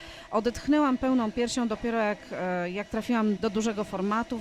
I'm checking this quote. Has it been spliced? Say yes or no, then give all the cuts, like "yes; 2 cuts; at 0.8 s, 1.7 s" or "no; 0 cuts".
yes; 1 cut; at 3.4 s